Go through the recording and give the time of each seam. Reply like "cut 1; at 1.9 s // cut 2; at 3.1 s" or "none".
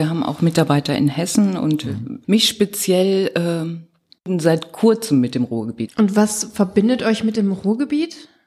cut 1; at 2.2 s // cut 2; at 5.9 s